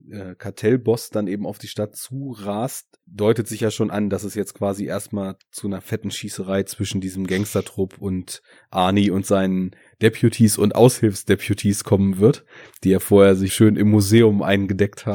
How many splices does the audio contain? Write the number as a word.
two